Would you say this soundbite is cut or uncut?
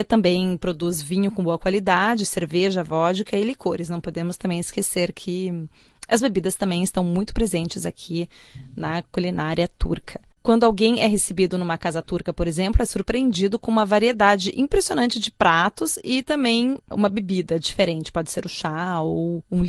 uncut